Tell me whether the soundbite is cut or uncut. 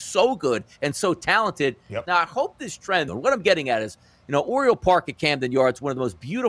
cut